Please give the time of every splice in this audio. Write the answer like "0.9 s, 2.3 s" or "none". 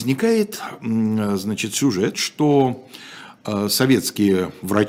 2.1 s